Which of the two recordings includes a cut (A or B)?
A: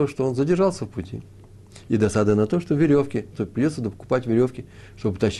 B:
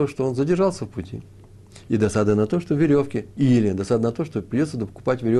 A